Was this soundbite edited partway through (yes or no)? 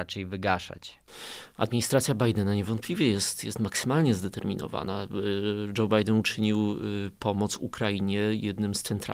no